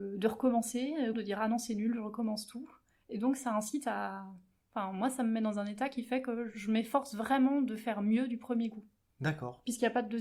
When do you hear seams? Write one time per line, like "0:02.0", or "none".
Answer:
0:01.1